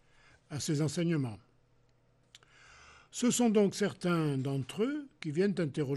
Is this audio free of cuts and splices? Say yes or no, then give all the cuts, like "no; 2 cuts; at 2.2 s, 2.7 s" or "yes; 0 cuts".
yes; 0 cuts